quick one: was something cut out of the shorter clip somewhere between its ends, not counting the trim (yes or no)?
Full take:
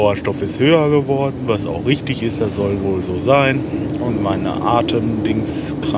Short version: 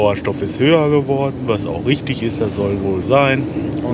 yes